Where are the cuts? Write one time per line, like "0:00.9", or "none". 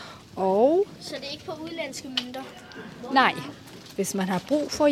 0:03.9